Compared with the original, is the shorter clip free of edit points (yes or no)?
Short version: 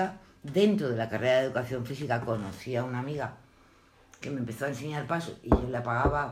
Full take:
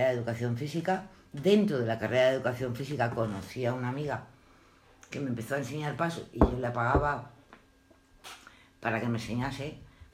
yes